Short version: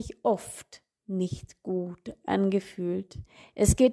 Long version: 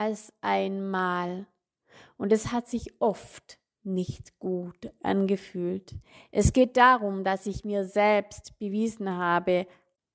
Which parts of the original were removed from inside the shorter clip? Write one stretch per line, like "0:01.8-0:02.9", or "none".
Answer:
none